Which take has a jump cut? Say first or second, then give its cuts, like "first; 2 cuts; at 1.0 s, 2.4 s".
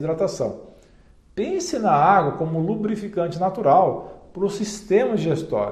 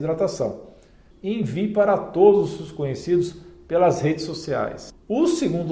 second; 1 cut; at 1.1 s